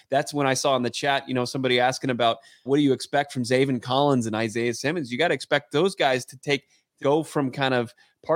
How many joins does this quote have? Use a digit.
2